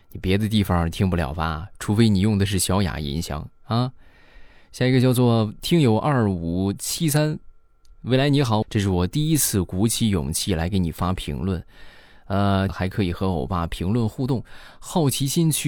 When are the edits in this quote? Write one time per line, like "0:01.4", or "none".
0:08.6
0:12.7